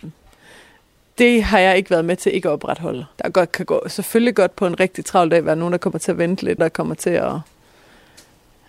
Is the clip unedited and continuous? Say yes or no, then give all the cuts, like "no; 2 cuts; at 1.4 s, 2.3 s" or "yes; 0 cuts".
no; 2 cuts; at 3.1 s, 6.6 s